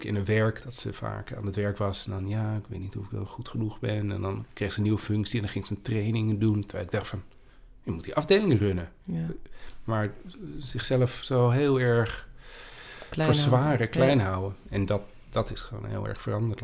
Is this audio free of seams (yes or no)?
yes